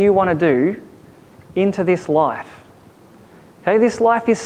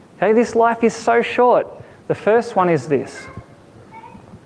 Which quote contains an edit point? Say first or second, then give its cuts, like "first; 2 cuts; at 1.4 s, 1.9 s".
second; 1 cut; at 1.9 s